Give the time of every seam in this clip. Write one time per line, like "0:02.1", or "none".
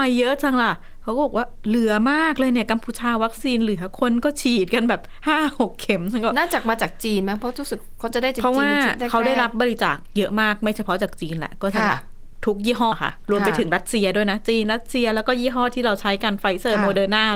0:12.9